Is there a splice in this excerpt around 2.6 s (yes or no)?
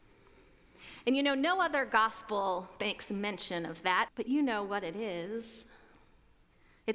no